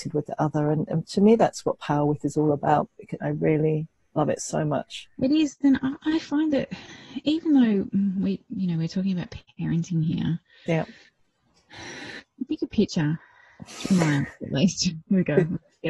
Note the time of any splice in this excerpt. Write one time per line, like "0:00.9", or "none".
0:03.2